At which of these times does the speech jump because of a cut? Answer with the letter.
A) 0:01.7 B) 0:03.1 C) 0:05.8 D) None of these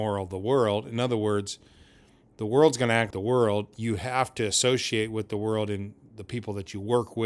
B